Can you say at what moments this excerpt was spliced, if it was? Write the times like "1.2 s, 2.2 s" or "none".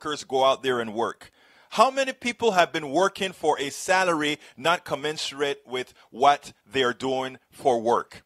none